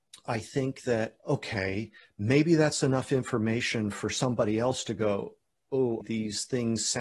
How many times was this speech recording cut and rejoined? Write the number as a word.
two